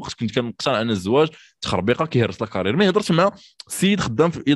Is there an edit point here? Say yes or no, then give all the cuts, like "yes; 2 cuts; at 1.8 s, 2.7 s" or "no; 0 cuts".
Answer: no; 0 cuts